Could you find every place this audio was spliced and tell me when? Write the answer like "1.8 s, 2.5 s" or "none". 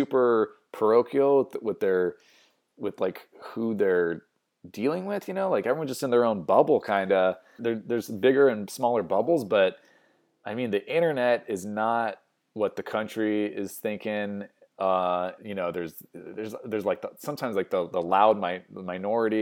7.6 s, 15.4 s